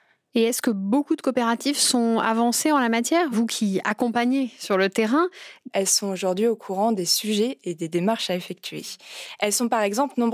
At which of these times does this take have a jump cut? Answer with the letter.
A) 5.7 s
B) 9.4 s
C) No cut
A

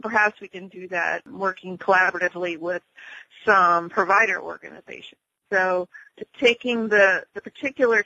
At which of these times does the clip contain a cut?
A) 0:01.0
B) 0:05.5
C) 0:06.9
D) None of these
B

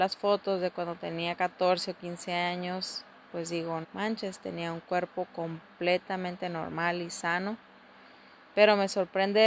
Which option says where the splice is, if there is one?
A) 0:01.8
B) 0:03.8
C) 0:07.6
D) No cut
B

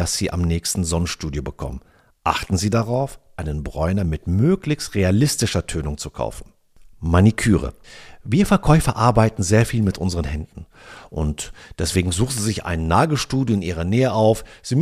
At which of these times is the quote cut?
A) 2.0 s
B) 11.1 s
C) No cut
B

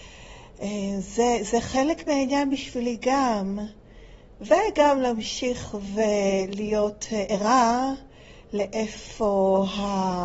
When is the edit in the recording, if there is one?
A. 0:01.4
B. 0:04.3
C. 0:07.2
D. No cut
D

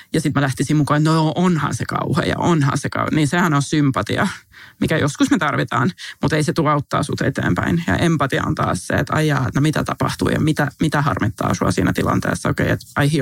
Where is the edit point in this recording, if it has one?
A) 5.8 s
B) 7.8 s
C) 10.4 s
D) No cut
D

